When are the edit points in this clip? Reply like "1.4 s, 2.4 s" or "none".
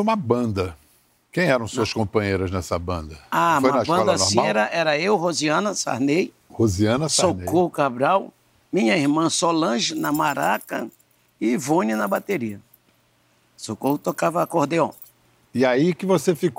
none